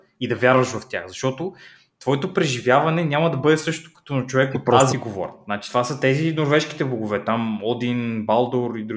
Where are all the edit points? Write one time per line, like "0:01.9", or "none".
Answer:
0:04.9